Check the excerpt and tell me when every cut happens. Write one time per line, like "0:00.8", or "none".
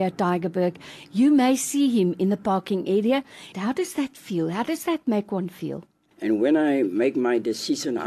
0:03.5
0:06.1

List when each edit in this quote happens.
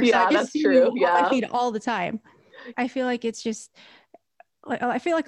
0:02.7

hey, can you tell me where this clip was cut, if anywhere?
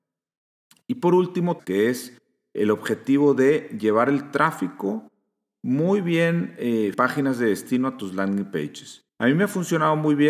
0:01.6
0:06.9
0:09.1

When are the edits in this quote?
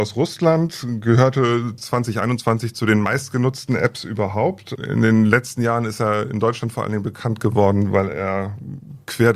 0:04.8

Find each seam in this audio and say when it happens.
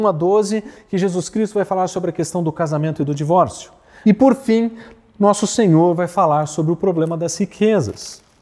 0:04.0

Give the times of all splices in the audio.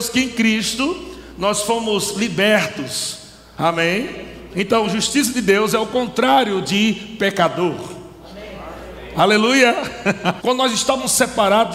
0:04.5
0:10.4

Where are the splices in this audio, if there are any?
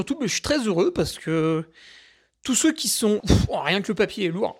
0:03.2

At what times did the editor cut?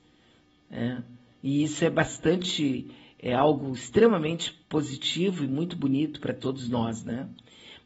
none

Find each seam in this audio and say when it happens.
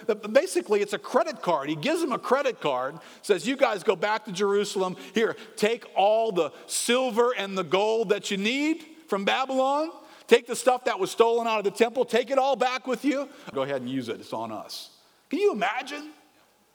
0:13.5

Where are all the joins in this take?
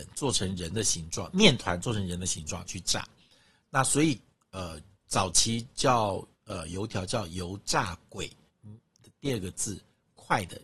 0:06.3
0:08.5

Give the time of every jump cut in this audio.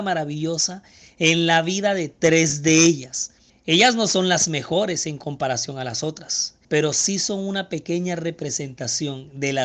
0:03.5
0:06.6

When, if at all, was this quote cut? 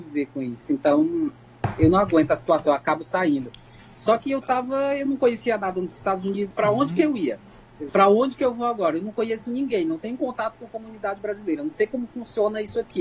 0:06.5
0:07.9

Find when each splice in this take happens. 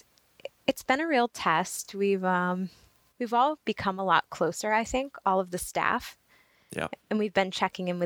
none

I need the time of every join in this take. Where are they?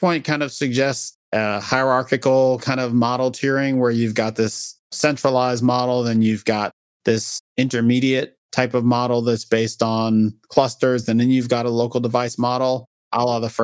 none

